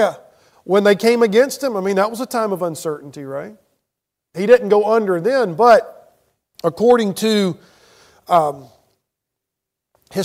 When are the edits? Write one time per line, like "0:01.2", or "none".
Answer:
none